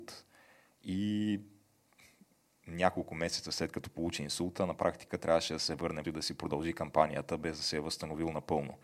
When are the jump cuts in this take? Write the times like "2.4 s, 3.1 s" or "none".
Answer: 6.0 s